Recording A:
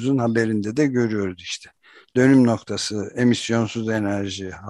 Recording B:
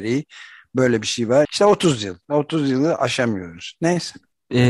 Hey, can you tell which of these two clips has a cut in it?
B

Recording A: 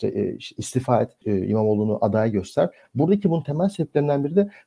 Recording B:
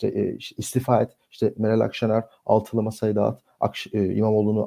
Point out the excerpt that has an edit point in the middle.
A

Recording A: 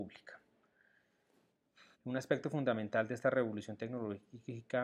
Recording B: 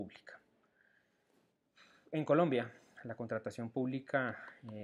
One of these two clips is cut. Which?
A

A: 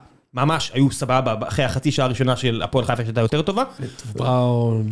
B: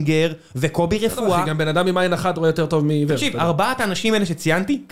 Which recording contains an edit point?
A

